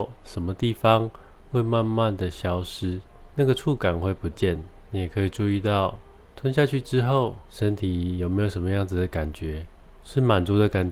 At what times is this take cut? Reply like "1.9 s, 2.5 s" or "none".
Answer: none